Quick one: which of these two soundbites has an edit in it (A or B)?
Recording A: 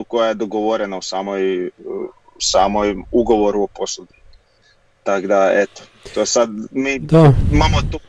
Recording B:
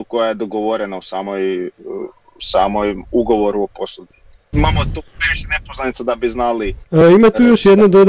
B